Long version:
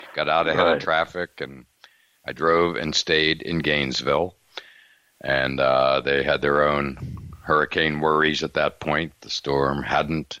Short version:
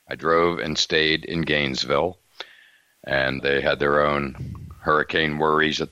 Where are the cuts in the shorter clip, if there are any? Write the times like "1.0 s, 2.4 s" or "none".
3.4 s

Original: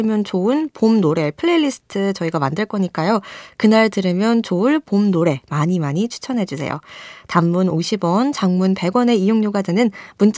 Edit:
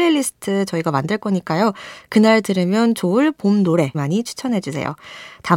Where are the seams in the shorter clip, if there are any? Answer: 3.9 s

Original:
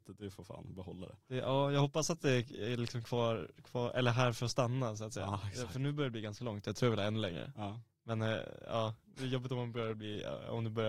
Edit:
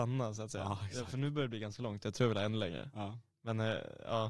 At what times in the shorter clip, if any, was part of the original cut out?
none

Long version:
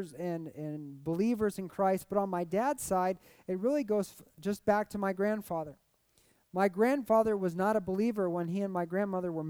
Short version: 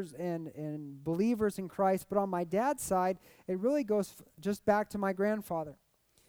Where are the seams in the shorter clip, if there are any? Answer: none

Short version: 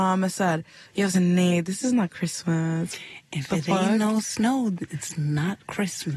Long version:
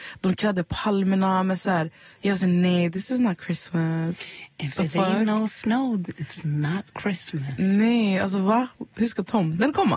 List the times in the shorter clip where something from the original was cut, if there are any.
none

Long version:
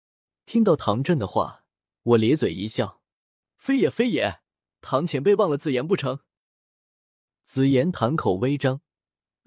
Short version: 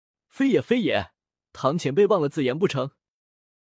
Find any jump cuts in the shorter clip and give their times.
none

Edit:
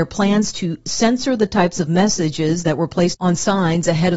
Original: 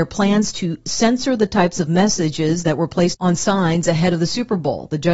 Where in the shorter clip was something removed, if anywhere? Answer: none

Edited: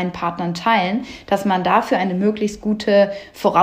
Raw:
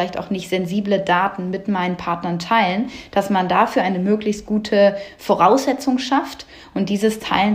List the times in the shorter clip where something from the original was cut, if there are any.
none

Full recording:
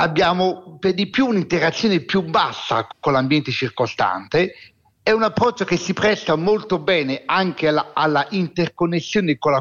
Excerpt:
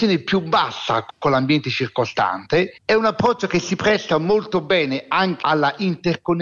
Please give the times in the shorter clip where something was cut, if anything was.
2.8 s, 5.4 s

